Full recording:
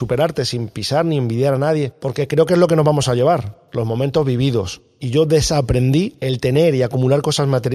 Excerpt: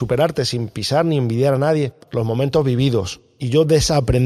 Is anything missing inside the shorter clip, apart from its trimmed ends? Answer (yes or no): yes